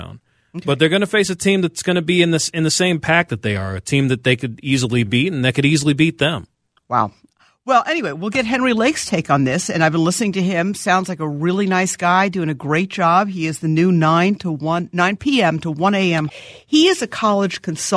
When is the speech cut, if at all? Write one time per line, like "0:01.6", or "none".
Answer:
0:16.3